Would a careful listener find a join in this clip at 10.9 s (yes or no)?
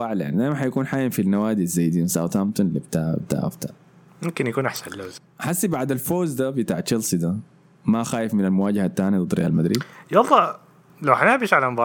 yes